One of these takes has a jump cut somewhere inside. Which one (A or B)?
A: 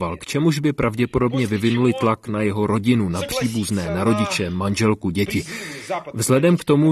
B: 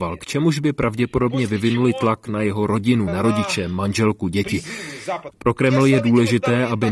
B